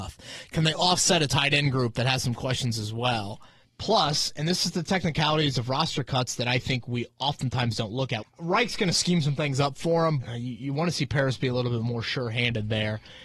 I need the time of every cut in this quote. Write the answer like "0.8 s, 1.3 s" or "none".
3.6 s, 8.2 s, 10.2 s